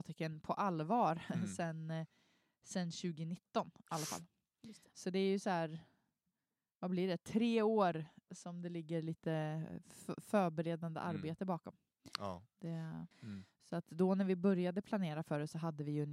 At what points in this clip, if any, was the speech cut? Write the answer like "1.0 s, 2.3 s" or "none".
13.1 s